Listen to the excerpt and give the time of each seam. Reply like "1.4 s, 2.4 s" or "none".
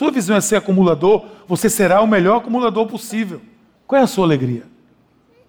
3.8 s